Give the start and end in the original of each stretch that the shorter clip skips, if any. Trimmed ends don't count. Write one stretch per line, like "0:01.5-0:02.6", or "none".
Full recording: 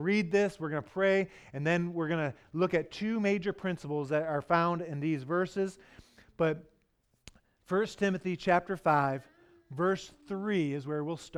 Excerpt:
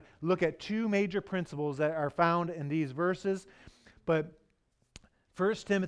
none

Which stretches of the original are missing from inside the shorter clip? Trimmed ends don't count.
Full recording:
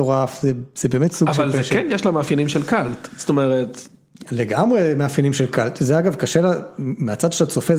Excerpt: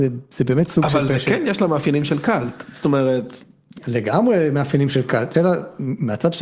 0:05.8-0:06.3

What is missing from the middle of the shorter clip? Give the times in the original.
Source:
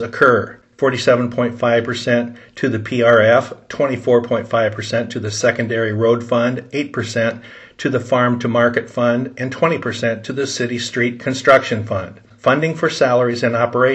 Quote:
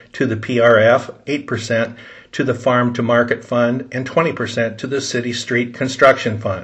0:03.7-0:06.7

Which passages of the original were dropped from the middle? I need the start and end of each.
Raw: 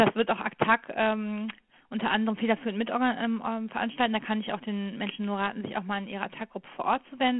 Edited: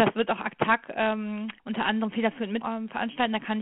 0:01.6-0:01.8
0:02.9-0:03.4

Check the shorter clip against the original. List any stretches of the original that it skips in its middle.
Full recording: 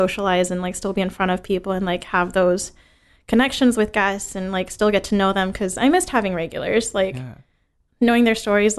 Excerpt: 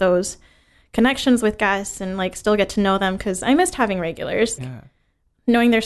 0:06.9-0:07.1

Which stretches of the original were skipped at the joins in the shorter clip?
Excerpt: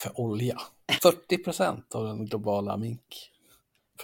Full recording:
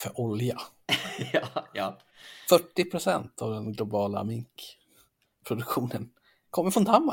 0:01.0-0:02.4

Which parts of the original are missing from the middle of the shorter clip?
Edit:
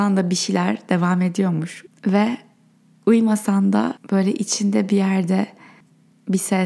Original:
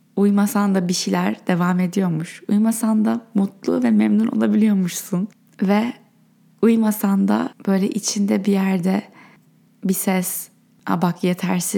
0:02.4-0:05.4

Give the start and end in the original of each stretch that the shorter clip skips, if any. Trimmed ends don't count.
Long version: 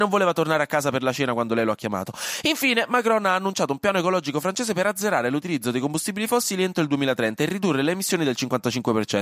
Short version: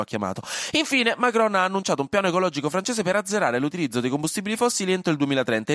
none

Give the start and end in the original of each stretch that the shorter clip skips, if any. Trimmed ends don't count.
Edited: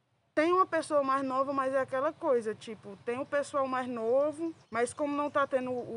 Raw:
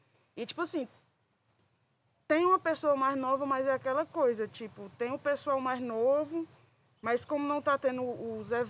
0:06.6-0:07.0

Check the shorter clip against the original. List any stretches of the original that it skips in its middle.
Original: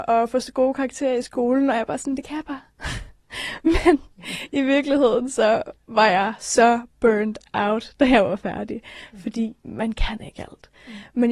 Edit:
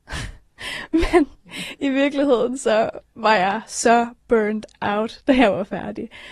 none

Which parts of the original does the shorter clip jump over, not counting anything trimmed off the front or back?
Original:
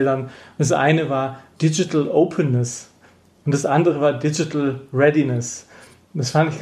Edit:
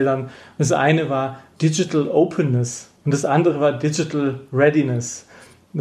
0:03.0-0:03.4

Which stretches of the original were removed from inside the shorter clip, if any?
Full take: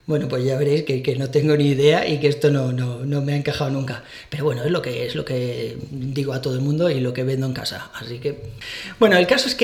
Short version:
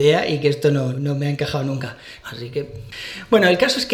0:02.7-0:03.0
0:04.3-0:07.9

